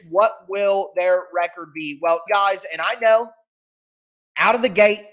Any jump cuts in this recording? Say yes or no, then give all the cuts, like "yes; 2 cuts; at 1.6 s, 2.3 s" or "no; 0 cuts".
yes; 1 cut; at 2.3 s